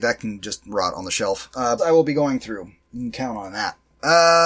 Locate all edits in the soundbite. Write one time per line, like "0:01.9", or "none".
0:01.8